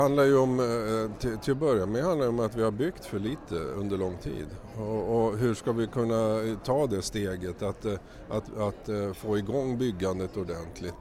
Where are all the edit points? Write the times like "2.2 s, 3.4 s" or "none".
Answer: none